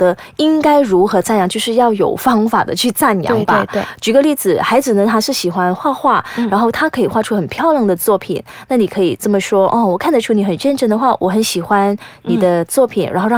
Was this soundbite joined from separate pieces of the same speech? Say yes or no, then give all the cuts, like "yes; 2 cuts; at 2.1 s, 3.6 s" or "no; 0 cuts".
no; 0 cuts